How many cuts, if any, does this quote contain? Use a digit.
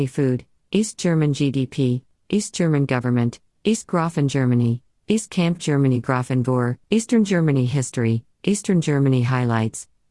2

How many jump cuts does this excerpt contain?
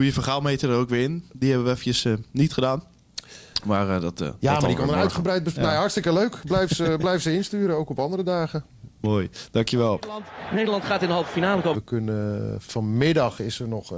2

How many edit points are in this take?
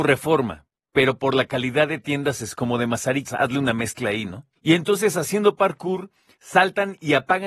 2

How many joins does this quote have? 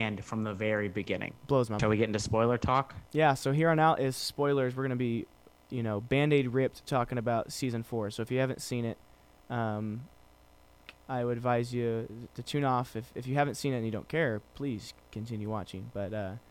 1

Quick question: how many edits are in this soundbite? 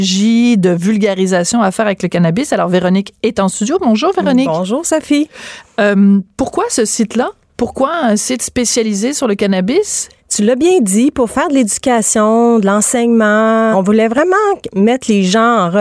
2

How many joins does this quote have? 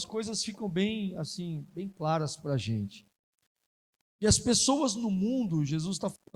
0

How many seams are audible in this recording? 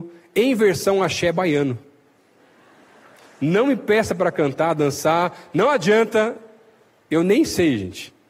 0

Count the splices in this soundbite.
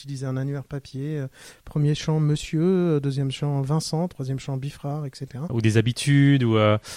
1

